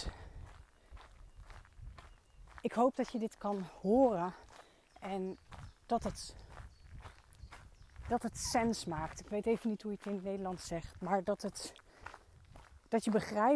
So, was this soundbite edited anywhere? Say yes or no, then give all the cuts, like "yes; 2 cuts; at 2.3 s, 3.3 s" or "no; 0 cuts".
no; 0 cuts